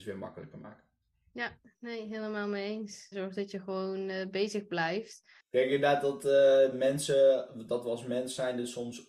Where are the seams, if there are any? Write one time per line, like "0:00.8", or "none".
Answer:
0:03.1
0:05.4